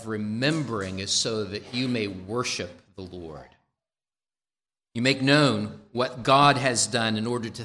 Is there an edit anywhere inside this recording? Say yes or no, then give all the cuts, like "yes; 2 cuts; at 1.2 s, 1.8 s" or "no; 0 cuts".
no; 0 cuts